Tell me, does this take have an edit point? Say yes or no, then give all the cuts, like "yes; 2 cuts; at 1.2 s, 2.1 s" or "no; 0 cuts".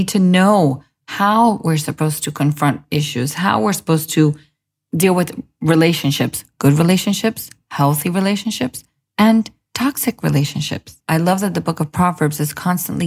no; 0 cuts